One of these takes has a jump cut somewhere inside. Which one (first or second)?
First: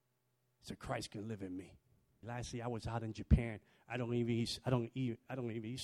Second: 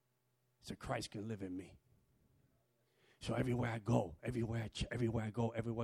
first